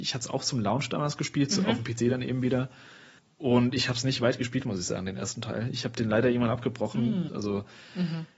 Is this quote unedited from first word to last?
no; 1 cut; at 7.3 s

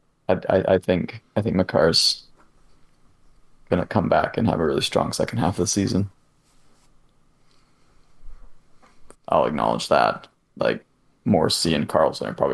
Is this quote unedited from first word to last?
no; 1 cut; at 9.1 s

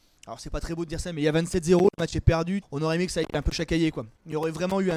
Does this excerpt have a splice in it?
yes; 1 cut; at 2.6 s

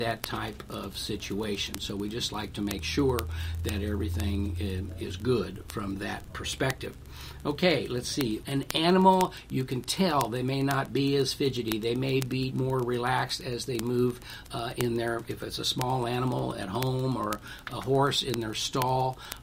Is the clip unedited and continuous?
no; 2 cuts; at 8.4 s, 12.5 s

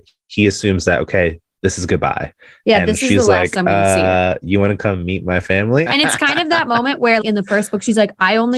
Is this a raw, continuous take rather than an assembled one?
no; 2 cuts; at 5.9 s, 7.2 s

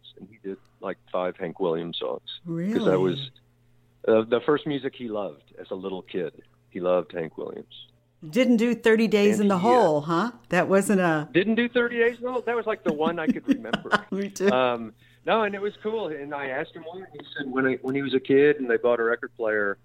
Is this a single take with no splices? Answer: yes; 0 cuts

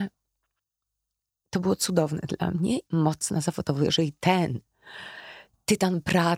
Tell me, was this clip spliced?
yes; 1 cut; at 2.9 s

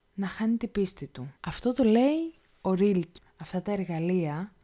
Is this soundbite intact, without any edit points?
no; 2 cuts; at 1.4 s, 3.2 s

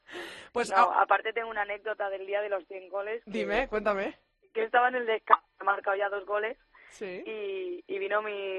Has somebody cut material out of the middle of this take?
no; 0 cuts

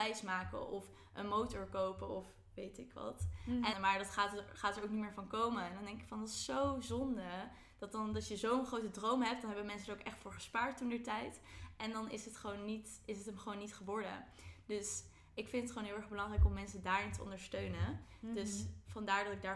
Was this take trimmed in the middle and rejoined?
yes; 1 cut; at 3.7 s

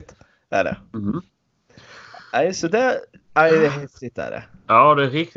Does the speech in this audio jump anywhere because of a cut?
no; 0 cuts

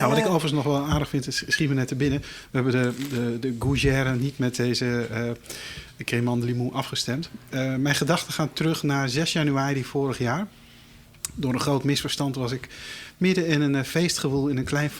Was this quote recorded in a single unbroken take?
yes; 0 cuts

